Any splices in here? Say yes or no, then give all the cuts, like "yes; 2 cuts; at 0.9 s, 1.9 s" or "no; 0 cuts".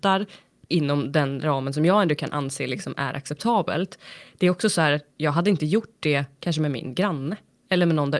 no; 0 cuts